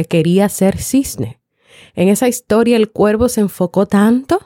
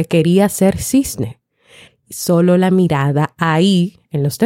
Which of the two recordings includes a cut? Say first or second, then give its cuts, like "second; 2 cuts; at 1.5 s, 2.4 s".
second; 1 cut; at 1.9 s